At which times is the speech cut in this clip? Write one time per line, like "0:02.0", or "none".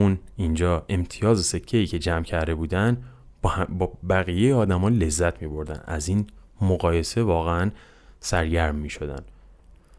none